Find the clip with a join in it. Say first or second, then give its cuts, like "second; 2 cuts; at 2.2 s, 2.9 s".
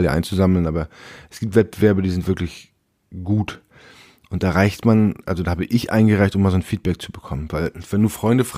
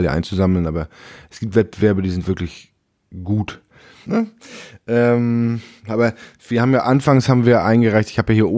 second; 1 cut; at 4.0 s